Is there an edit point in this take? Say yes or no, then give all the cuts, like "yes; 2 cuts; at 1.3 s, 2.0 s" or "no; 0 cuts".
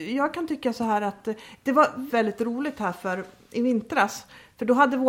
yes; 1 cut; at 2.1 s